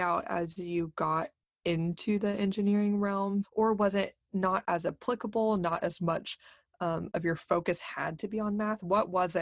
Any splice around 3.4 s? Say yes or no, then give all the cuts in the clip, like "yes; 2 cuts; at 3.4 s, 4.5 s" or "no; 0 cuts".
yes; 1 cut; at 3.4 s